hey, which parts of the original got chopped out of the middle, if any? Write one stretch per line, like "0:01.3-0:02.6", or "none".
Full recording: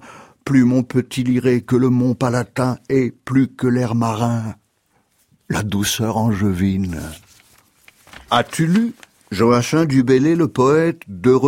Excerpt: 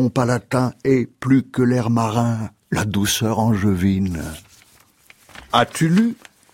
0:04.6-0:05.4

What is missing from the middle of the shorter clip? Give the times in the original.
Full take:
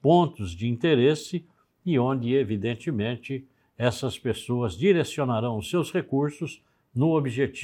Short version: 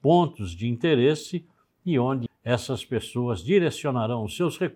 0:02.3-0:03.6

